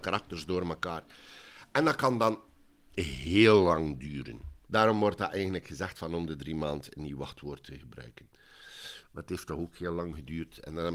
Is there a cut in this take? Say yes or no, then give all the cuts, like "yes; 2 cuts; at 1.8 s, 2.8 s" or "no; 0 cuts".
yes; 2 cuts; at 4.6 s, 9.0 s